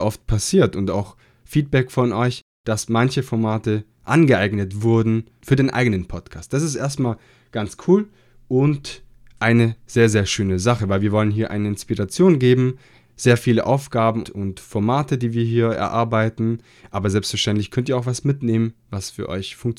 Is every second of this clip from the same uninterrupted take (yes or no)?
no